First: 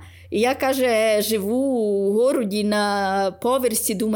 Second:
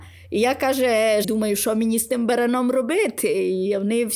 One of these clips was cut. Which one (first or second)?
second